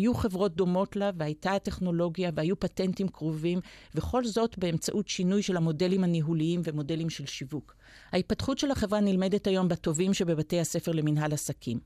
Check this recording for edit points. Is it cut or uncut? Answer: uncut